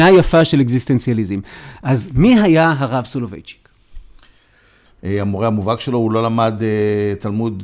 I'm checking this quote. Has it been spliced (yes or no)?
yes